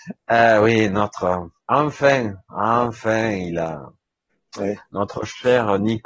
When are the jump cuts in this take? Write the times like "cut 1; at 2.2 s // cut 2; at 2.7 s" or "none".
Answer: cut 1; at 1.6 s